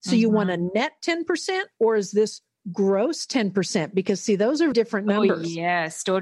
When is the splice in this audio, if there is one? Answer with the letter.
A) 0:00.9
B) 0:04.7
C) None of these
B